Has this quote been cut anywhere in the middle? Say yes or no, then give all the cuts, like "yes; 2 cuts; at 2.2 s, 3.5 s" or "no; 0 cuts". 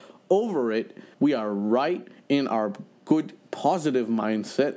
yes; 1 cut; at 1.1 s